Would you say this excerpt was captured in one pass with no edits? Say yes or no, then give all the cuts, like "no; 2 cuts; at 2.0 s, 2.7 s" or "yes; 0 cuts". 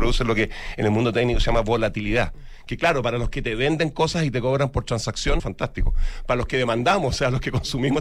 no; 1 cut; at 5.4 s